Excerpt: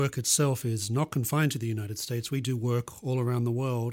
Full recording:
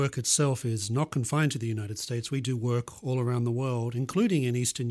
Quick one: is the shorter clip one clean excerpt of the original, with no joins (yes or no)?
yes